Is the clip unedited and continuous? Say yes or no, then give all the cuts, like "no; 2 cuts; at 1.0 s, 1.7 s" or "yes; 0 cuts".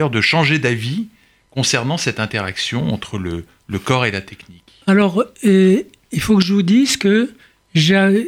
yes; 0 cuts